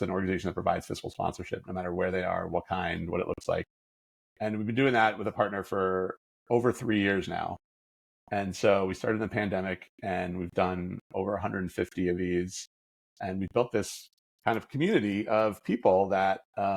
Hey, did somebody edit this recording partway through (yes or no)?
no